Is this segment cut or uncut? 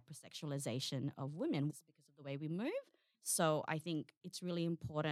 cut